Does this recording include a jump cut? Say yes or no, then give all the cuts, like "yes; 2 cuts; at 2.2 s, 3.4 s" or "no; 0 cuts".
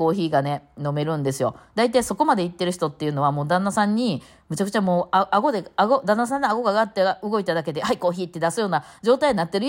no; 0 cuts